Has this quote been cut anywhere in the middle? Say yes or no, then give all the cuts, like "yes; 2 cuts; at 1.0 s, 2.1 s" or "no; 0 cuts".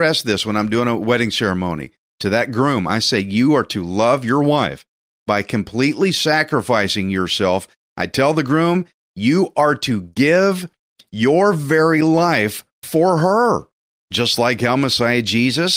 no; 0 cuts